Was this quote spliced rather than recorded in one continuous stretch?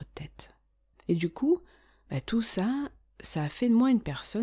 yes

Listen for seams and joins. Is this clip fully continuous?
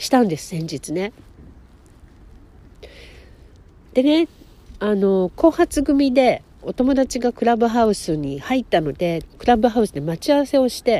no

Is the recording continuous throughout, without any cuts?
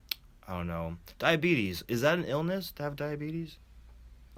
no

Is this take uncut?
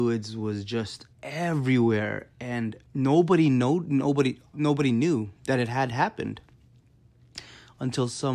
no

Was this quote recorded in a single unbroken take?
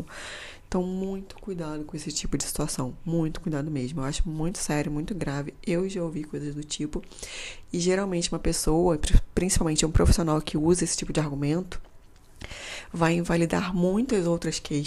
yes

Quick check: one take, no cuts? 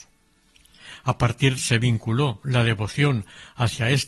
no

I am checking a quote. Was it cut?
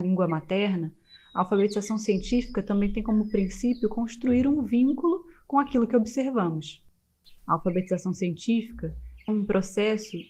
yes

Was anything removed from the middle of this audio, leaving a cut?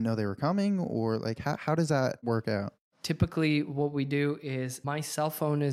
no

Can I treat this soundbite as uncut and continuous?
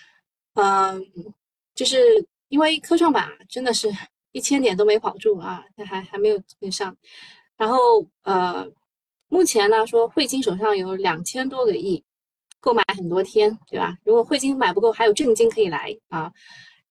yes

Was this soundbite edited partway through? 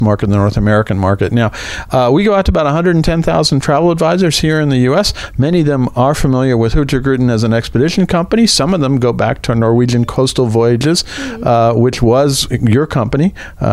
no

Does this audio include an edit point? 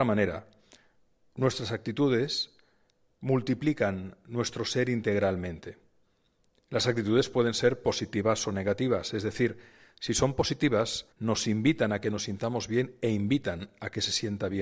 yes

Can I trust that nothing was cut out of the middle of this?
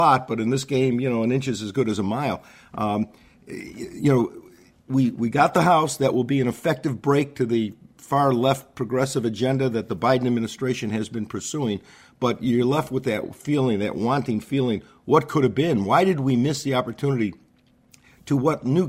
yes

